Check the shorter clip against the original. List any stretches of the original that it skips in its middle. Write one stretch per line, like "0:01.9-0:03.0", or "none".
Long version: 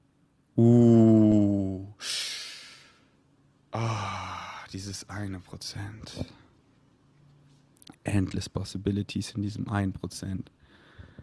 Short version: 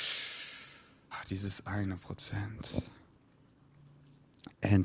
0:03.2-0:04.5

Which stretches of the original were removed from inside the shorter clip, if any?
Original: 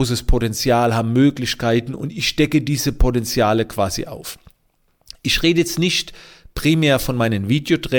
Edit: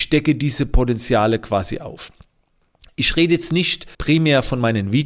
0:06.2-0:06.5

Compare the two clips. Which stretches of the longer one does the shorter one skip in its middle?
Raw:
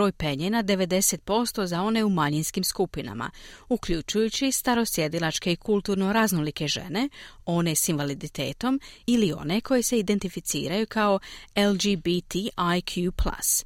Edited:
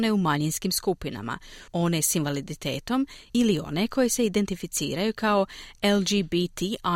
0:03.6-0:07.4

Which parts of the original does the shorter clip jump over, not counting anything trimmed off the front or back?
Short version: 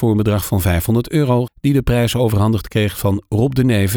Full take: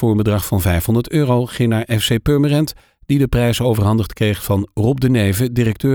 0:01.5-0:02.9

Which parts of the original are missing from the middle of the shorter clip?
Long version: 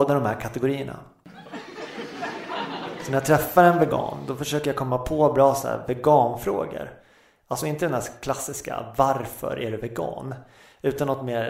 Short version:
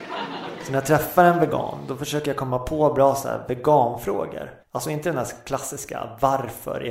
0:07.0-0:07.4

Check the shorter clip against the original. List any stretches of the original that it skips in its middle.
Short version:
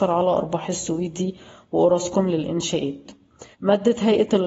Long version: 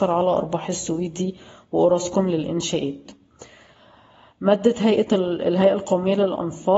0:03.5-0:04.3

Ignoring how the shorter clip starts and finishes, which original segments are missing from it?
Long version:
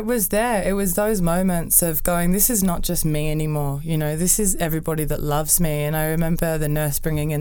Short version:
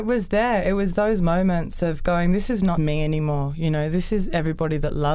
0:02.8-0:03.0

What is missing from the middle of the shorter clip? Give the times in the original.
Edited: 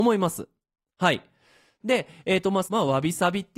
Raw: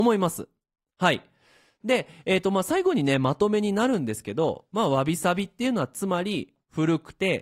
0:02.6-0:04.7

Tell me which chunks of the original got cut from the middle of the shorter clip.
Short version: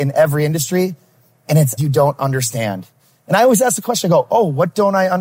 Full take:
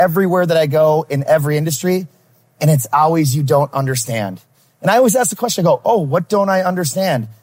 0:02.9-0:03.3

